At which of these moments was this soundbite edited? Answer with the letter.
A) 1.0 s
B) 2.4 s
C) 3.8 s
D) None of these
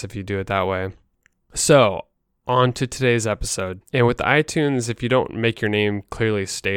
C